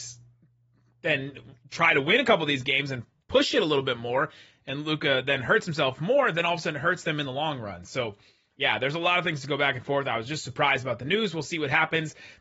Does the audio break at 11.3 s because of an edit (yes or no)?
no